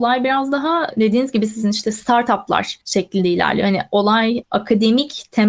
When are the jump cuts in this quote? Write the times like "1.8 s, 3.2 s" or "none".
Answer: none